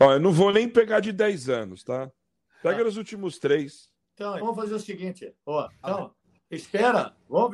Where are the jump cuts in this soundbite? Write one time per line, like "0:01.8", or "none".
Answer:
0:04.4
0:05.8